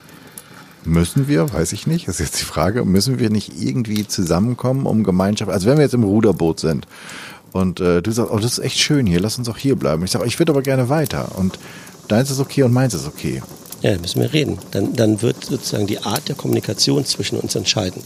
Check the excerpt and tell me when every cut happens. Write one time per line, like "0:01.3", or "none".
0:13.8